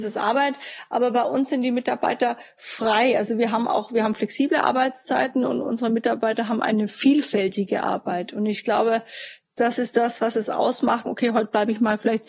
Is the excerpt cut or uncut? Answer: cut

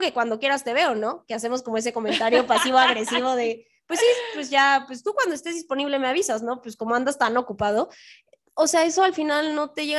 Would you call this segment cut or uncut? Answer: uncut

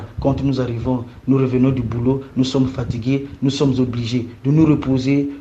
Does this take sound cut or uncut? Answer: uncut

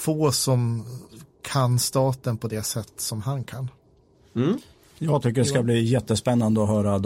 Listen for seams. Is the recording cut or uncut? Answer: uncut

